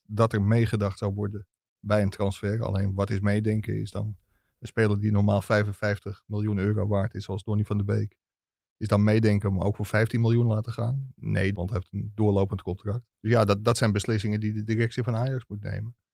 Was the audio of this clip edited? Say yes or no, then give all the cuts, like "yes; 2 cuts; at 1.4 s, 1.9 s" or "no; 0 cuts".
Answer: yes; 2 cuts; at 11.5 s, 13.1 s